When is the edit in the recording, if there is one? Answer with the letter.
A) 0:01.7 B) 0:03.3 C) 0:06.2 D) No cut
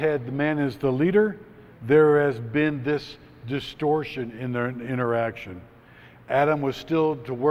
A